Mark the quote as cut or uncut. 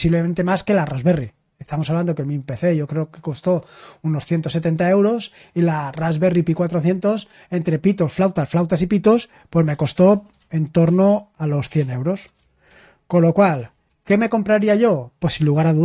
uncut